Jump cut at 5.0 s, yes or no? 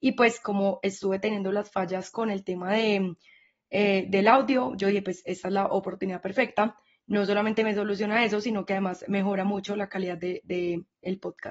no